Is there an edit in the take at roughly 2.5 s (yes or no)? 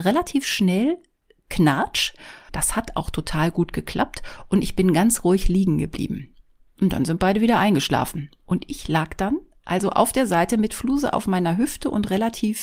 yes